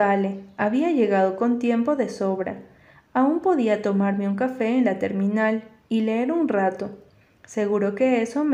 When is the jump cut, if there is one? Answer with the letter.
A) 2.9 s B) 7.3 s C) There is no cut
C